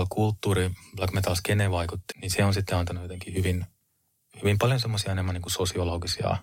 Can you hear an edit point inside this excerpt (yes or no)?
yes